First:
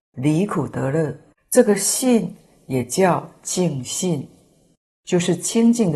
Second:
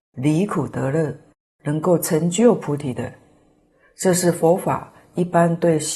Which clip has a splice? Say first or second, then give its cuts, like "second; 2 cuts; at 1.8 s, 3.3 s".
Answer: first; 1 cut; at 1.4 s